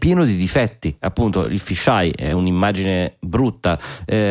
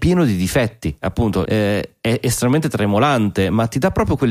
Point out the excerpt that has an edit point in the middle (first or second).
second